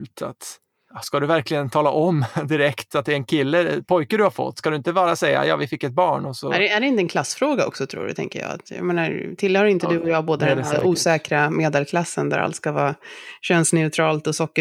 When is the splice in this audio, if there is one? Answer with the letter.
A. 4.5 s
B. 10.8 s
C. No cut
C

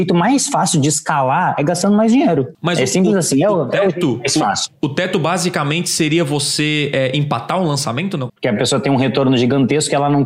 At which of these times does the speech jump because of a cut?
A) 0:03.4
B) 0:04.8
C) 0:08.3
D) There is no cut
C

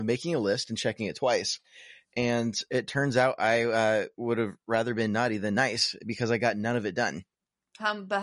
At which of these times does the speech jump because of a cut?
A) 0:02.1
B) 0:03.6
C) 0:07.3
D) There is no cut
D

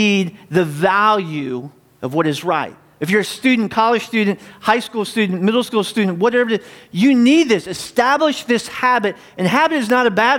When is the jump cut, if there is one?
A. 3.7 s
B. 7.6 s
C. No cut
C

